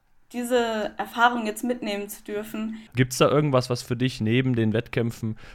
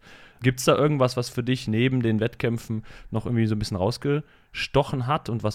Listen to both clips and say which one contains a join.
first; 1 cut; at 2.9 s

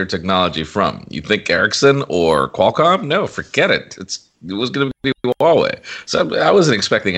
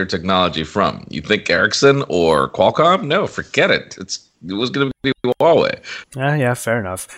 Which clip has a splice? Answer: second; 1 cut; at 6.0 s

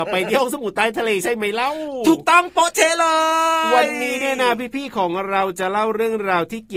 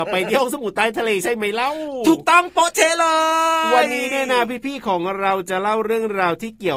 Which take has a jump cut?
second; 1 cut; at 3.9 s

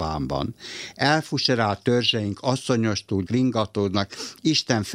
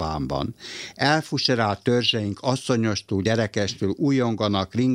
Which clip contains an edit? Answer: first; 1 cut; at 3.3 s

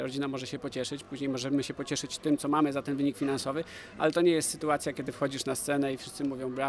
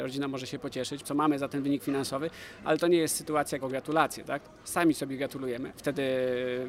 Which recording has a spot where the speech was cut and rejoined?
second; 3 cuts; at 1.0 s, 3.6 s, 5.8 s

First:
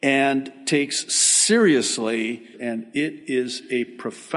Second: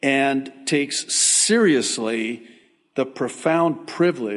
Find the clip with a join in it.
first; 1 cut; at 2.5 s

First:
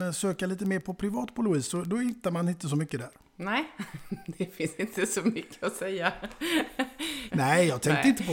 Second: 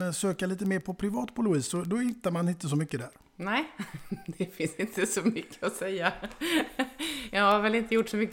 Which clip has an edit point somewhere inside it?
first; 1 cut; at 7.3 s

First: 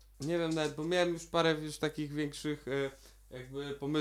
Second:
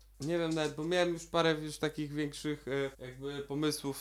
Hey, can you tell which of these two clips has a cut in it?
second; 1 cut; at 2.9 s

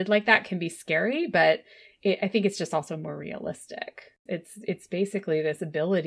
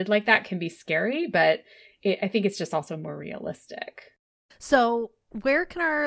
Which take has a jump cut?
first; 1 cut; at 4.3 s

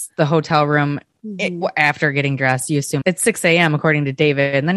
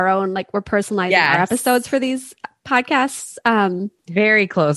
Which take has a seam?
first; 1 cut; at 3.0 s

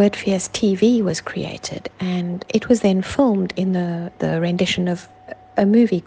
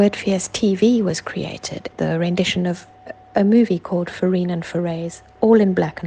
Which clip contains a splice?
second; 1 cut; at 1.9 s

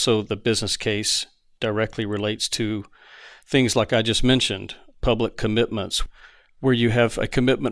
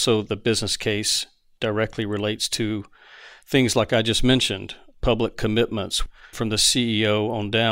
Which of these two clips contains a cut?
second; 1 cut; at 6.3 s

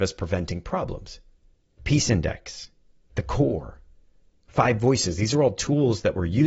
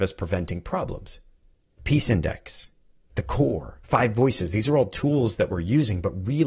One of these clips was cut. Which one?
second; 1 cut; at 3.8 s

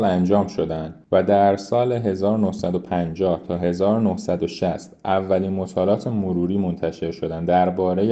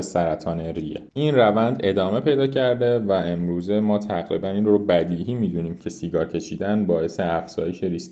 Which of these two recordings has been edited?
second; 1 cut; at 1.1 s

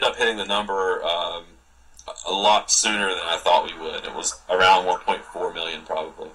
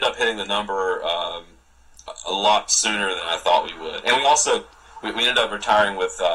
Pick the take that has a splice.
first; 1 cut; at 4.0 s

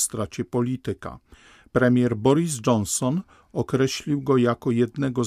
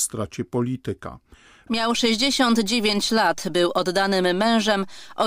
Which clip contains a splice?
second; 1 cut; at 1.7 s

